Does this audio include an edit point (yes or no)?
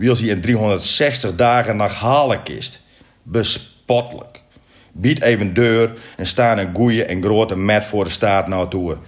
no